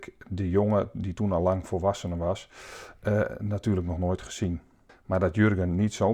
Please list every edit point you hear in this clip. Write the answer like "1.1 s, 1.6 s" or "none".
4.9 s